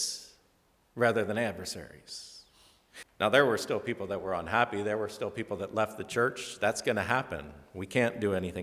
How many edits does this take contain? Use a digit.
1